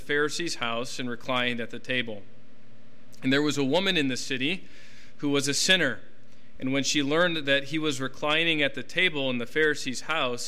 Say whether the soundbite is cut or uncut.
uncut